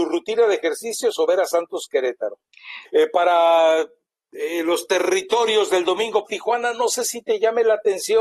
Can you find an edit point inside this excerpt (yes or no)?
yes